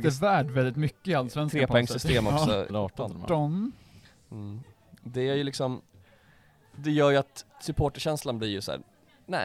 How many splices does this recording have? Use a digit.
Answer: 2